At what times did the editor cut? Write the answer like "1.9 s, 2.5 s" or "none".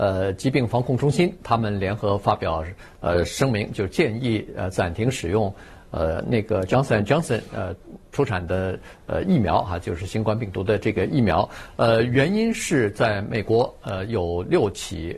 none